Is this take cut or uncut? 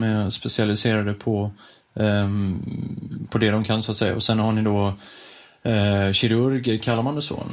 cut